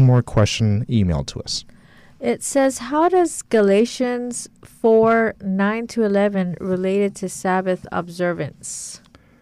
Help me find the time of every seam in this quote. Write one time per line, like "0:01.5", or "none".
none

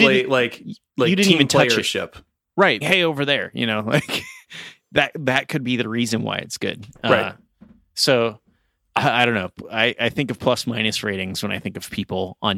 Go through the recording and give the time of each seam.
0:02.8

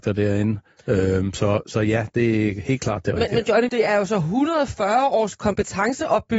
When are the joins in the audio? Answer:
0:03.7

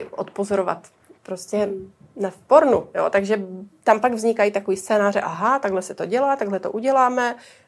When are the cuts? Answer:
none

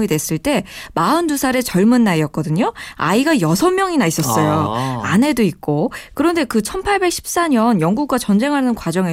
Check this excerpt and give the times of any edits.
0:06.1

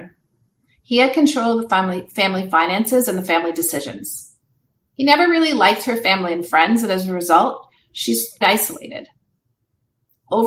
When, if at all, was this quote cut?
0:08.4

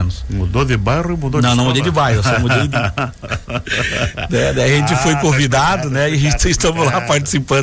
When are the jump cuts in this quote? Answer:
none

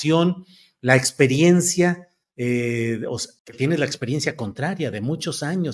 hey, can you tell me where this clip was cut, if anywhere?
0:03.4

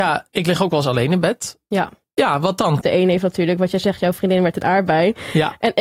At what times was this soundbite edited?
0:02.8

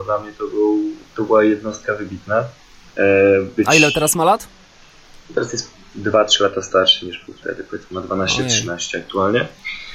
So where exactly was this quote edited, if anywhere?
0:02.9

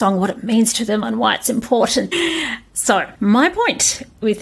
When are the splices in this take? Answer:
0:02.1

